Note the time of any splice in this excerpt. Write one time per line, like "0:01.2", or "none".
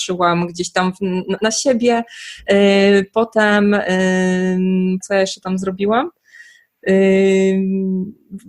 0:01.4
0:05.0